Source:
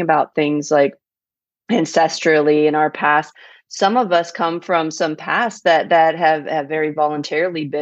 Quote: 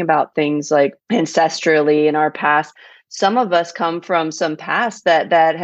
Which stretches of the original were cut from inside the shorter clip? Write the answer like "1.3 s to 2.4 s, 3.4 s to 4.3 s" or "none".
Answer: 1.0 s to 1.6 s